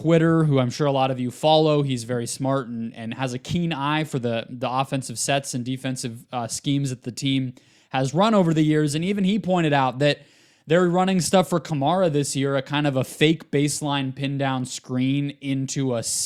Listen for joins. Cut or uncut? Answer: uncut